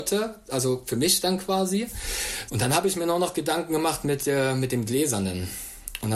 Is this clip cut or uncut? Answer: cut